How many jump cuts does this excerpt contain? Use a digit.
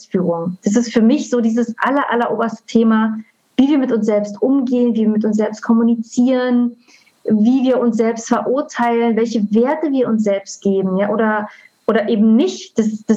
0